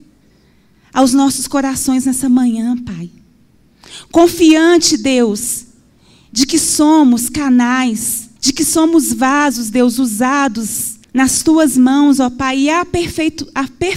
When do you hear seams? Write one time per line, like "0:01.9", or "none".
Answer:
0:08.4
0:11.0